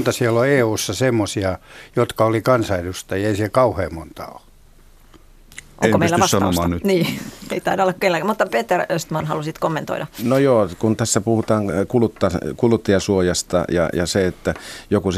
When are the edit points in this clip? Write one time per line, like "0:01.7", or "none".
none